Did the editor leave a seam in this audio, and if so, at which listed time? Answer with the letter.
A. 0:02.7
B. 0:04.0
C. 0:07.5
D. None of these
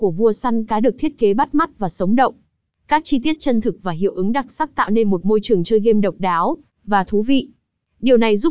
D